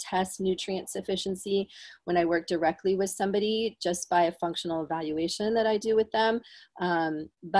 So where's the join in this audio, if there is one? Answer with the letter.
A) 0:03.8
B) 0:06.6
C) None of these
C